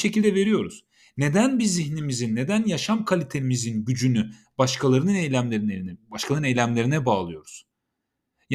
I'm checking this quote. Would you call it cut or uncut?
uncut